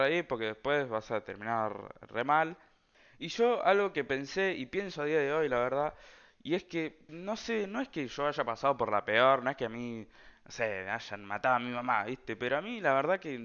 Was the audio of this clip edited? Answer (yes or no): yes